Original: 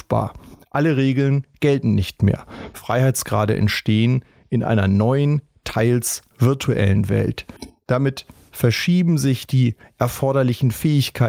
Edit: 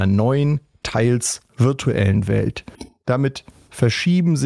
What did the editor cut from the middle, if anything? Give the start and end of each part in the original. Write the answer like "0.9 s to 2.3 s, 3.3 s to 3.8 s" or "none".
none